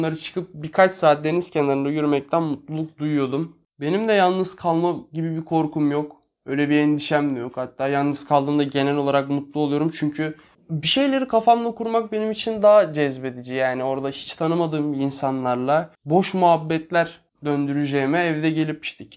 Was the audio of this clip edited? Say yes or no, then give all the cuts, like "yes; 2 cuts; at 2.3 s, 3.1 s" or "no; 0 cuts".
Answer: no; 0 cuts